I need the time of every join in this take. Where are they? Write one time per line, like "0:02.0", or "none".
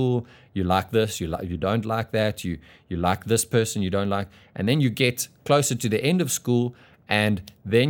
none

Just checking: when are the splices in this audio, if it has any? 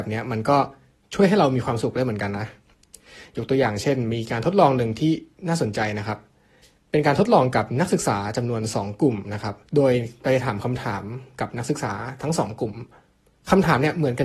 0:09.7

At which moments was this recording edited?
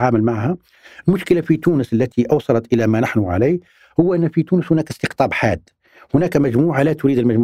none

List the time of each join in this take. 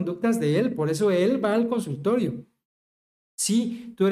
0:03.2

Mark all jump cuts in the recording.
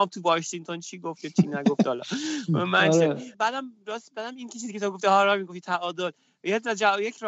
0:03.3

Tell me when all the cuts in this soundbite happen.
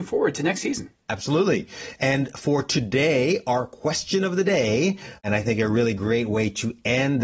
none

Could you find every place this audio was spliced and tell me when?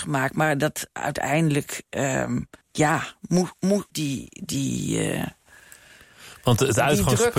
0:02.6
0:03.9

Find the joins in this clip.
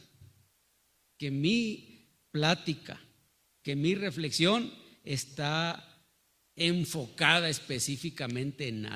none

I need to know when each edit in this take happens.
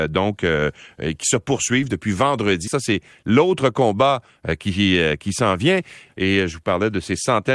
0:02.7
0:06.1

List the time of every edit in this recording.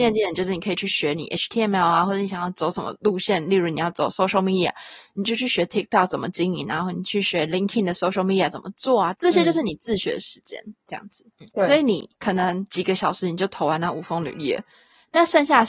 0:09.1
0:11.5

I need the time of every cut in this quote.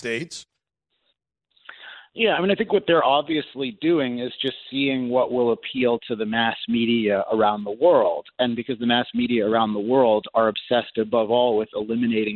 none

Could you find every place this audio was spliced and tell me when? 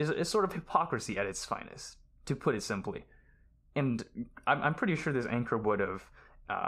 none

